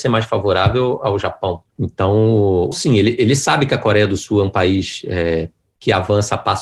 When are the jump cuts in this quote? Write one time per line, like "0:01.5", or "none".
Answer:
0:02.7